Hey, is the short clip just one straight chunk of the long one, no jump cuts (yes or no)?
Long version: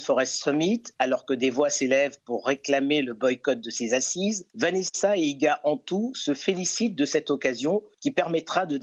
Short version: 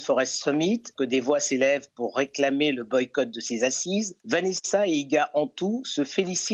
no